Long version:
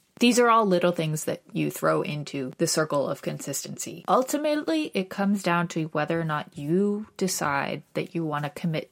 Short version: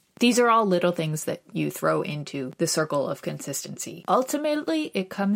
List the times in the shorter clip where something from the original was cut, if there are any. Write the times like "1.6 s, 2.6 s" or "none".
none